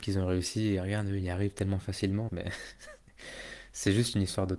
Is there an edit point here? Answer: yes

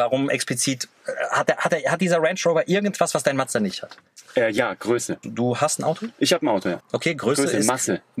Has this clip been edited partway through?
yes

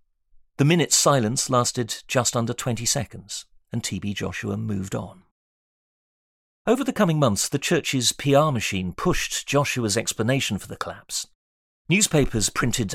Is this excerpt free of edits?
yes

